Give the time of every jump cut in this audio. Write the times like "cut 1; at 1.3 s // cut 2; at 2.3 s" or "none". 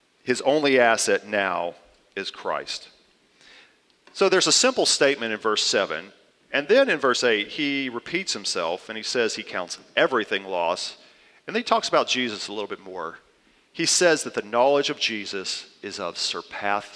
none